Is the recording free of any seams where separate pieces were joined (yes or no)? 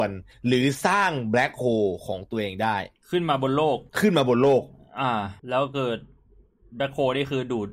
no